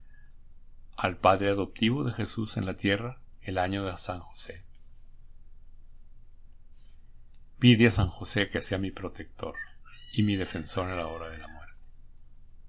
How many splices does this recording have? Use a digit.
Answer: 1